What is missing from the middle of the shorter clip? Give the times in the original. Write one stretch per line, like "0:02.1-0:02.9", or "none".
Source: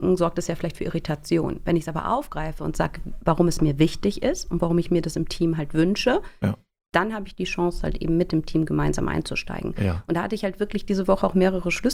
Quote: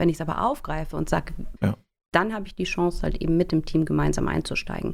0:03.2-0:06.4